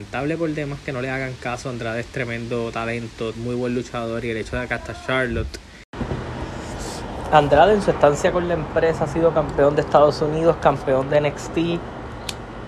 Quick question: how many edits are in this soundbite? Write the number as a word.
one